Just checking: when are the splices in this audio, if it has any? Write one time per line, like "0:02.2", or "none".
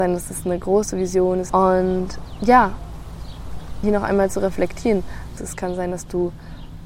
0:01.5
0:03.8
0:05.4